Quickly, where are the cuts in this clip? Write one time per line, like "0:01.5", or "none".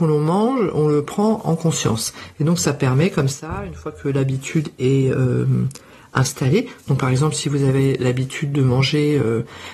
none